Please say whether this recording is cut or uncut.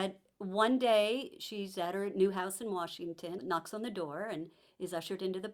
cut